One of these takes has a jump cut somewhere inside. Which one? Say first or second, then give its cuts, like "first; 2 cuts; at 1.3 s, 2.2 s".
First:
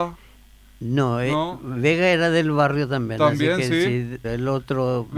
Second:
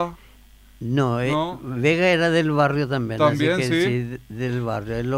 first; 1 cut; at 4.2 s